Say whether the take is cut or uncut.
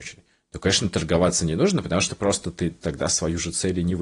uncut